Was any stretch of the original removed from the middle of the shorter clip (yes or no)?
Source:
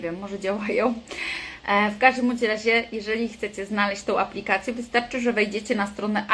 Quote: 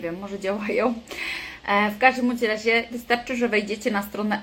yes